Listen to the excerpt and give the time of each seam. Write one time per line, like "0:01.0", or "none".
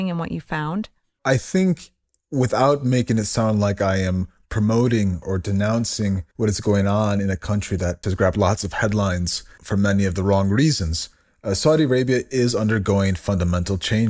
0:08.0